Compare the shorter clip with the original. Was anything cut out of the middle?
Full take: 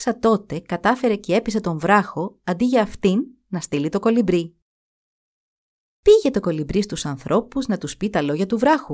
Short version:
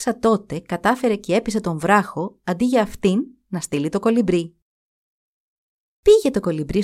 no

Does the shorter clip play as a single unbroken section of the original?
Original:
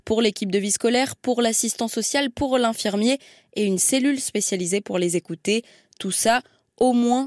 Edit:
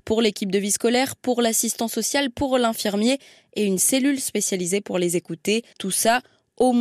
no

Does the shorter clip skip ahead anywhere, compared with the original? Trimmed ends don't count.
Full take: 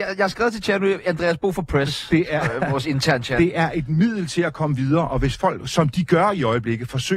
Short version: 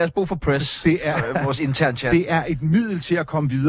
no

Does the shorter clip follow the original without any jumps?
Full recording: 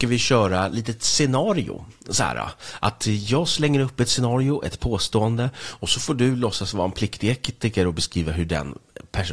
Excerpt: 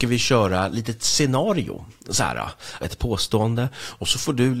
no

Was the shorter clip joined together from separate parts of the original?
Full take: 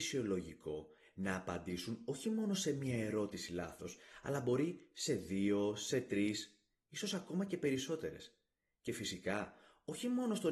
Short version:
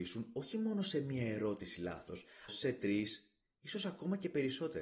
yes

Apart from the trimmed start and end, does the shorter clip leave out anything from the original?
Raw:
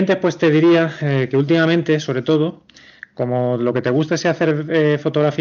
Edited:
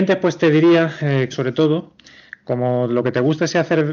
yes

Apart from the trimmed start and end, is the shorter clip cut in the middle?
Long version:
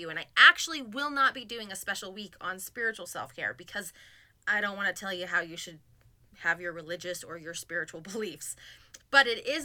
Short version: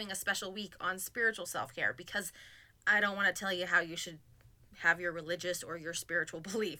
no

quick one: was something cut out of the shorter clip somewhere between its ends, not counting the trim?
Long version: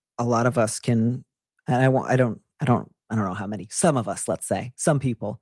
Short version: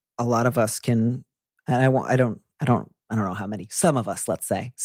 no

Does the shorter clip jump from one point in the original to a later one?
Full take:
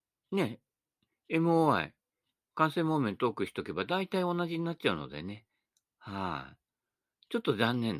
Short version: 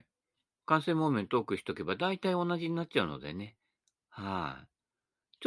no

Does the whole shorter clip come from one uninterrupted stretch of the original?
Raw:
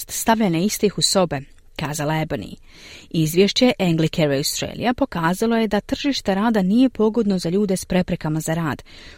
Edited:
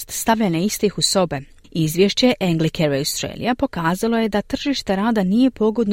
no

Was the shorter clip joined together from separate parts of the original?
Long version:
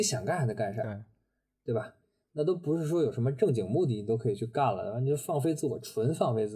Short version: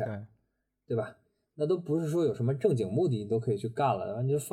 no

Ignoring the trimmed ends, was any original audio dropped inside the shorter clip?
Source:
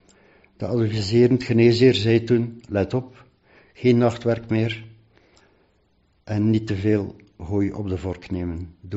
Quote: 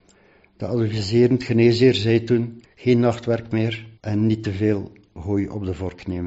yes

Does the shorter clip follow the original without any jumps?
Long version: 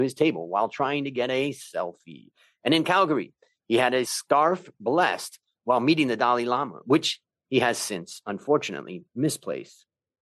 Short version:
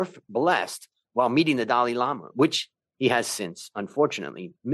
yes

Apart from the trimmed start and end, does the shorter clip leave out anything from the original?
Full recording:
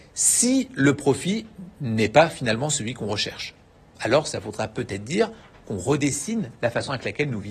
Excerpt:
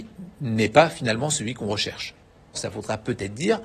yes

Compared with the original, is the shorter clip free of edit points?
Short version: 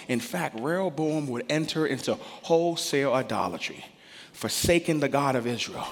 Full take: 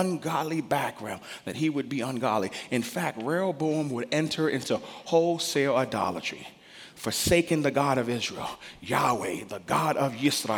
yes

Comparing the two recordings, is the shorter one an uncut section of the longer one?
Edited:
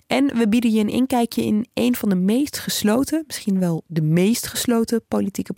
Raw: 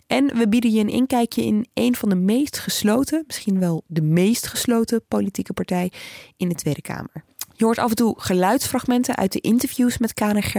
yes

